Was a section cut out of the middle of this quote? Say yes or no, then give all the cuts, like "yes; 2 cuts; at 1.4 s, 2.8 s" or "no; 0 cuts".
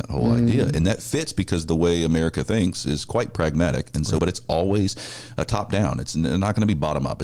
yes; 1 cut; at 4.2 s